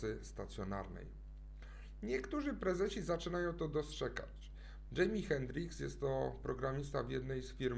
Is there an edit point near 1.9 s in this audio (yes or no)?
no